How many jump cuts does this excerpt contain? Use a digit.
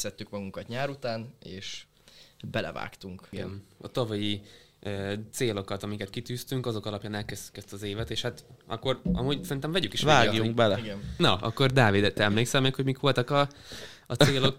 0